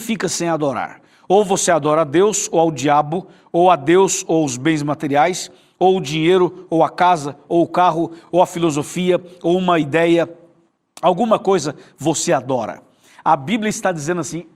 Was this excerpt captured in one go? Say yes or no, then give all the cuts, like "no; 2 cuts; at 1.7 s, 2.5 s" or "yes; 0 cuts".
yes; 0 cuts